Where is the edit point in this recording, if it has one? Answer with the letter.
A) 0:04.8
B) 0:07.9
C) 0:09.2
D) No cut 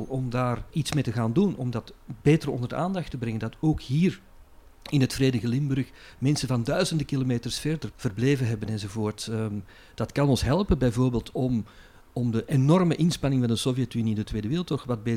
B